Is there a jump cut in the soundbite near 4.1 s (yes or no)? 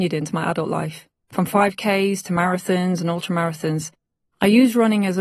no